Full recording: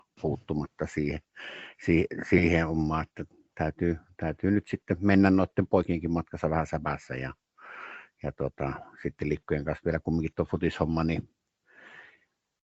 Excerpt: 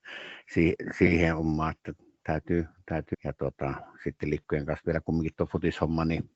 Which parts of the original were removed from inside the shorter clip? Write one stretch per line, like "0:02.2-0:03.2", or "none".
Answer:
0:04.4-0:08.1